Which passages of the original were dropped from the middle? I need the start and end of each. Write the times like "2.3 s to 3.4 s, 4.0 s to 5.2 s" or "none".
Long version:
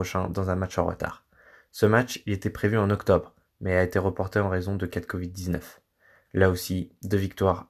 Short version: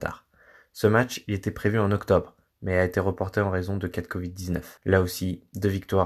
5.8 s to 6.3 s